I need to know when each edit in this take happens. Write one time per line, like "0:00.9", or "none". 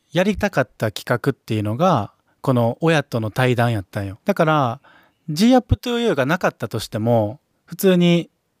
0:04.2

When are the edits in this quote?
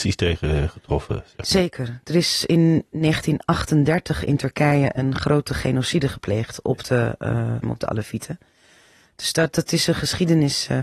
0:07.6

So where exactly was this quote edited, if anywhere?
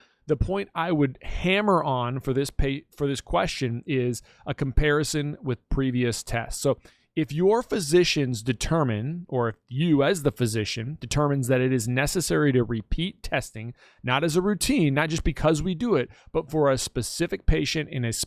none

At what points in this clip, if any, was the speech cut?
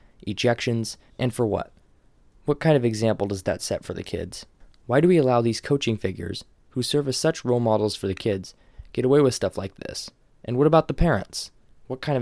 0:01.1

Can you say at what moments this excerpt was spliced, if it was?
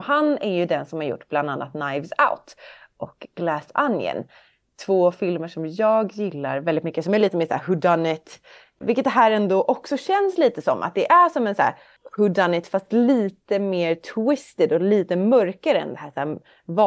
none

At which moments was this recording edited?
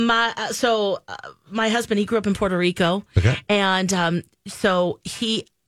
none

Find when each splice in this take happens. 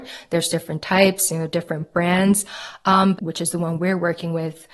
0:03.2

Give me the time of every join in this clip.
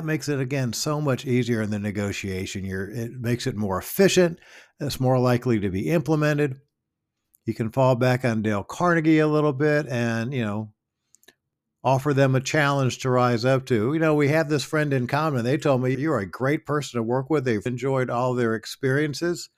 0:15.9
0:17.7

